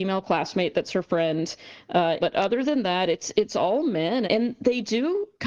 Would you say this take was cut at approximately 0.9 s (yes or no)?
no